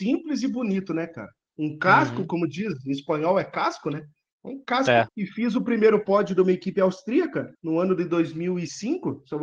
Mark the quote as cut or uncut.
cut